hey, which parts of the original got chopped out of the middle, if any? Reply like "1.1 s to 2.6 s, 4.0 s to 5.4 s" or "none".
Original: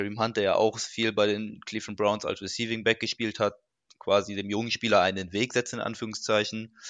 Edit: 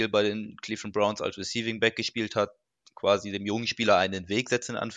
none